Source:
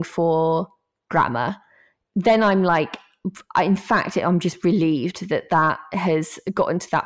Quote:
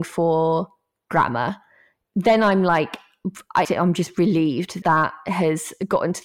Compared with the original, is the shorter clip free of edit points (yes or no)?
no